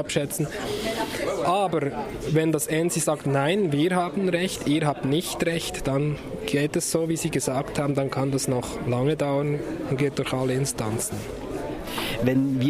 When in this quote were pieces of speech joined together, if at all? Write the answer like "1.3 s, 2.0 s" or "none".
none